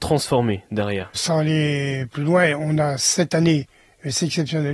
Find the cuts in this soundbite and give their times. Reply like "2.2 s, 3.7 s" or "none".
1.2 s